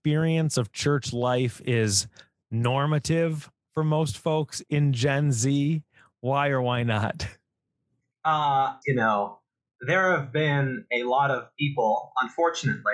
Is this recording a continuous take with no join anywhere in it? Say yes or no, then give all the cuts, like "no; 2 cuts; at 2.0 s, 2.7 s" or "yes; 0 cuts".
no; 1 cut; at 8.8 s